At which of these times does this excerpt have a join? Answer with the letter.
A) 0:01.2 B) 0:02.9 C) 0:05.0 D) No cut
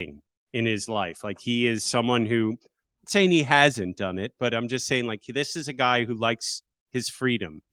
D